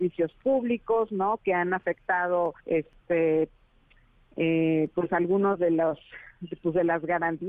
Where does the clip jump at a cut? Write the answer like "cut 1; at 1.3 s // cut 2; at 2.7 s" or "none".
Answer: cut 1; at 2.6 s